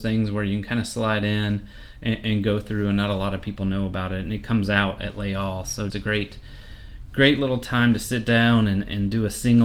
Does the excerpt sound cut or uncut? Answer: cut